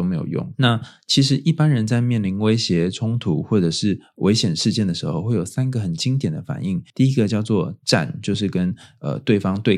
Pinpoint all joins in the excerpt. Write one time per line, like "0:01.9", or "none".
0:06.9